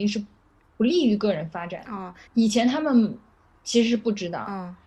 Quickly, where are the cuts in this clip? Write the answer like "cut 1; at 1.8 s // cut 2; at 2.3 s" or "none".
cut 1; at 2.3 s